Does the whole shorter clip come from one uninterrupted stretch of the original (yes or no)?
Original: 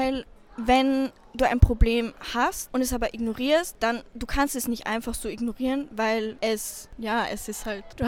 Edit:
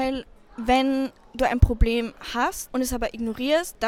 yes